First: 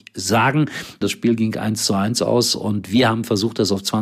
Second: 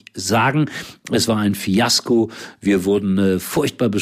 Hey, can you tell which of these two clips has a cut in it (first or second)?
first